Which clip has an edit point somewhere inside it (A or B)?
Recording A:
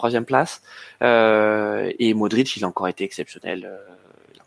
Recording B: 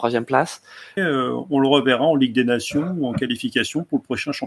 B